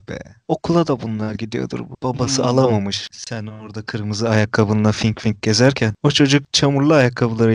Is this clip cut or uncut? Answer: uncut